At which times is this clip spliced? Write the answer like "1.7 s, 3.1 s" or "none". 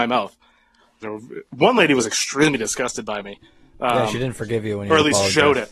1.0 s